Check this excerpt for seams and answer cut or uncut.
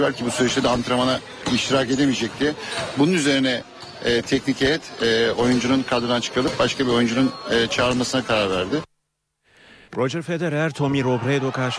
cut